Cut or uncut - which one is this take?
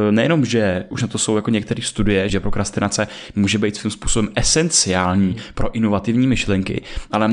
cut